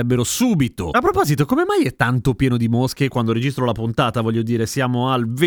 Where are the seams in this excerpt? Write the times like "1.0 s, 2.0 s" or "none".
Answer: none

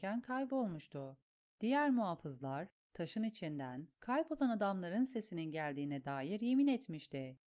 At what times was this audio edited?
none

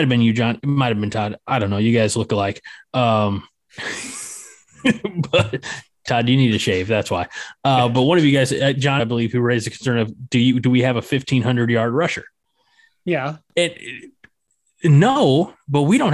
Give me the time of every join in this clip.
9.0 s

